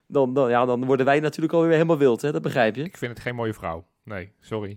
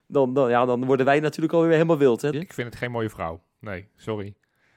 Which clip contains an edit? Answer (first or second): second